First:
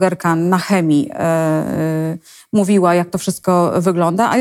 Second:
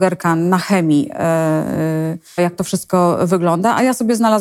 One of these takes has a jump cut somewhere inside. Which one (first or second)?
second